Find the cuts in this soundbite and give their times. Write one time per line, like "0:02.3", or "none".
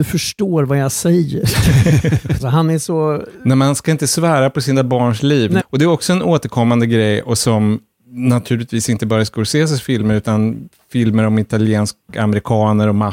0:02.4
0:05.6